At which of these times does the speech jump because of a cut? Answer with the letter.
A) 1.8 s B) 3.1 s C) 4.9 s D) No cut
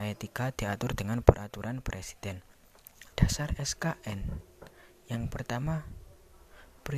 B